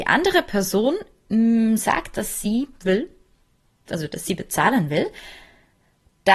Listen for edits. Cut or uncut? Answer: uncut